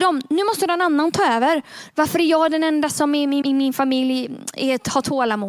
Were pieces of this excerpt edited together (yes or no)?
yes